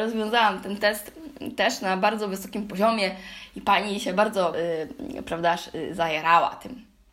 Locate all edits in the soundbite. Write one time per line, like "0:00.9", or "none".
0:04.5